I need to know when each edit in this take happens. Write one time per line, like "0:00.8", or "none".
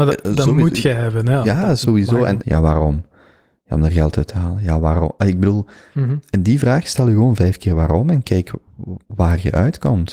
0:02.4